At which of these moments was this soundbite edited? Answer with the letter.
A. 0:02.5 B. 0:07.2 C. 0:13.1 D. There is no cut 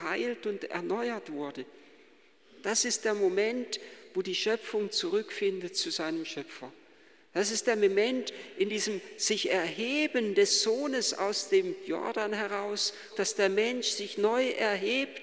C